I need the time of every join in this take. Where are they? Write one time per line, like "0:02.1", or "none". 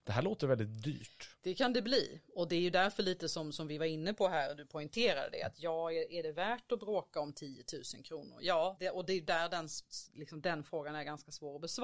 0:08.8

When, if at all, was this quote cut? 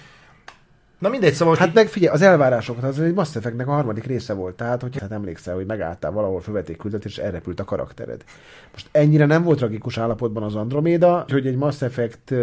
0:05.0
0:11.3

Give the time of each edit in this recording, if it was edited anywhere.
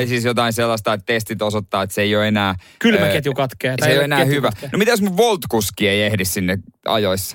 none

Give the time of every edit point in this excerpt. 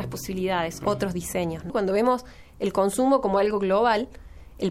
0:01.7

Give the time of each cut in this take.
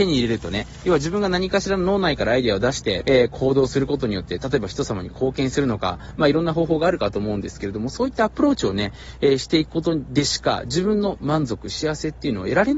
0:03.0

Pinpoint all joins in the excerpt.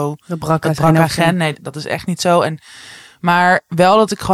0:01.5

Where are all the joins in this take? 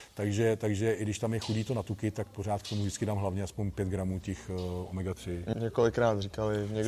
0:05.5

